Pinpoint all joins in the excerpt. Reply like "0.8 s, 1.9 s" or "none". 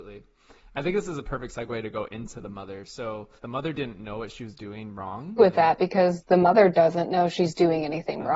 3.4 s, 5.4 s